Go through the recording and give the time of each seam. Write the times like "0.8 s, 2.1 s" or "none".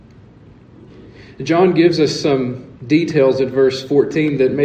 2.8 s